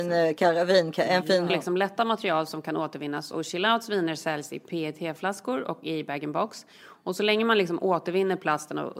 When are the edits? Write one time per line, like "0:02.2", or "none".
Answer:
0:01.5